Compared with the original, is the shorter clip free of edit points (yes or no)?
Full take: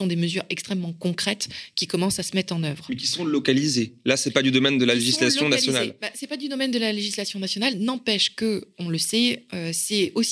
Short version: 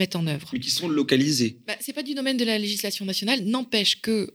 no